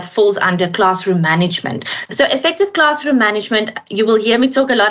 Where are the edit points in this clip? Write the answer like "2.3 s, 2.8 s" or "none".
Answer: 2.1 s